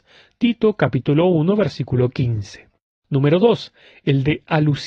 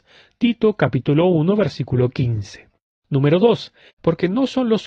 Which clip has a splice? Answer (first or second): second